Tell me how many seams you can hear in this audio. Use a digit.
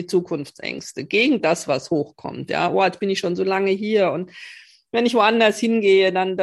0